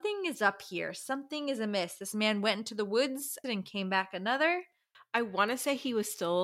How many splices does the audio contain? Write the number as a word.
one